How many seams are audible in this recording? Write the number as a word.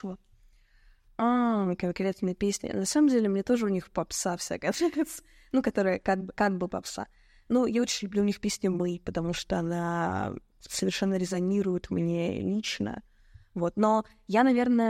one